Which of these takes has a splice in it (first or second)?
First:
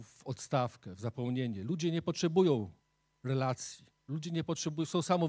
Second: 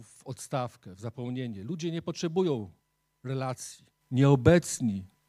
second